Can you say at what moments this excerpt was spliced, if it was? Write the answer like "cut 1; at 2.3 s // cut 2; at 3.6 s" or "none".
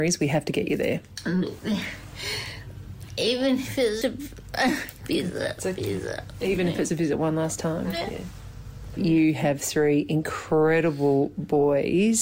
cut 1; at 4.0 s // cut 2; at 6.9 s